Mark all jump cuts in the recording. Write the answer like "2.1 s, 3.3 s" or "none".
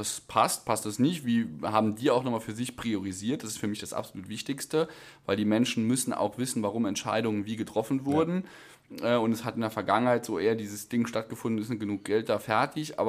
none